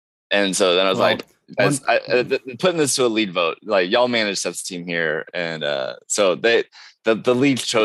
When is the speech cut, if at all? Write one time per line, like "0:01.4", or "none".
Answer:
none